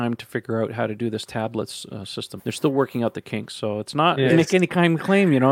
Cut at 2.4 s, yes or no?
yes